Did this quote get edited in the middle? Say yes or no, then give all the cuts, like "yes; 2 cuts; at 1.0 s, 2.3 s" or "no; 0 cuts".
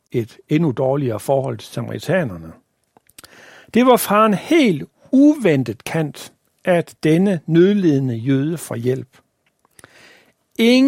no; 0 cuts